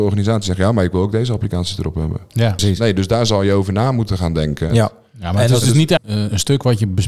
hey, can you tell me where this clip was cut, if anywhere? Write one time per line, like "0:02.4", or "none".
0:02.6
0:04.7
0:06.0